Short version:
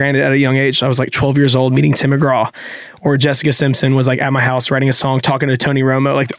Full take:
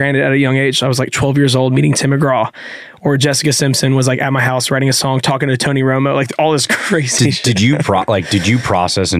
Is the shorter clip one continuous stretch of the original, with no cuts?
yes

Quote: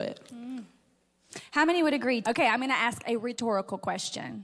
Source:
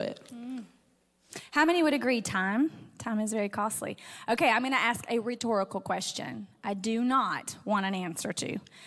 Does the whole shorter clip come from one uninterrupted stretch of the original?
no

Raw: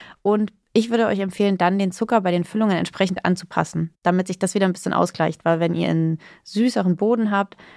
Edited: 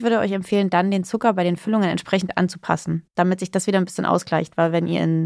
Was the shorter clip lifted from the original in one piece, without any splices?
yes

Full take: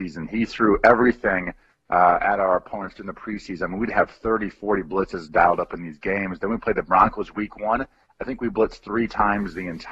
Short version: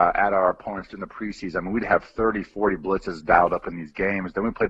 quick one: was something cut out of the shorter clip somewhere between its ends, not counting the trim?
no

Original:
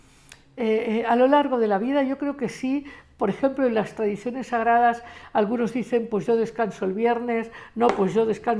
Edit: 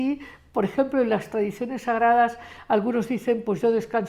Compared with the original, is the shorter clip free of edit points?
yes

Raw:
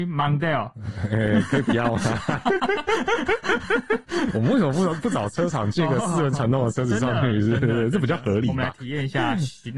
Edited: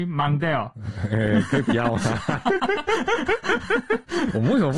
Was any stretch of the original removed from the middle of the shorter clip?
no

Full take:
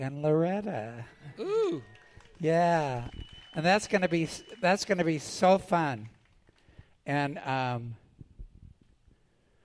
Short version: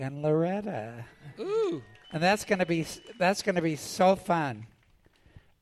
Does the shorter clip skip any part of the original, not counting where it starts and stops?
yes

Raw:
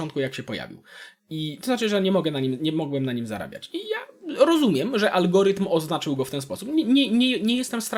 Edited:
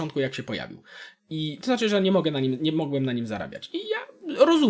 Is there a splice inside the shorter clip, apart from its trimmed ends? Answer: no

